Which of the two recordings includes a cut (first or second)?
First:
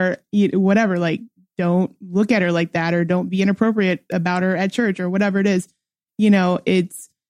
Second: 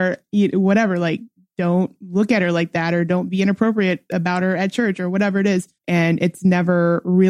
second